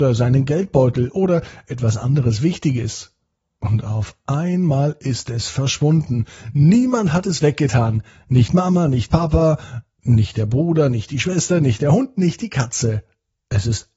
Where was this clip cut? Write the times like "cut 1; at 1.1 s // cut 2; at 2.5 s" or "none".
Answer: none